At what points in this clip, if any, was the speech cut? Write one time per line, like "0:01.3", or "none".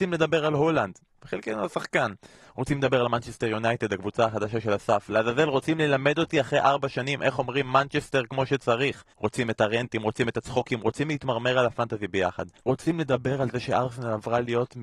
0:01.2
0:09.1
0:12.6